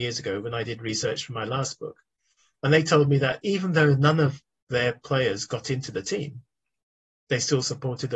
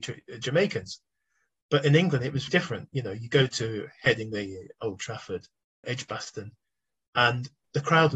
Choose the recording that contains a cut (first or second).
second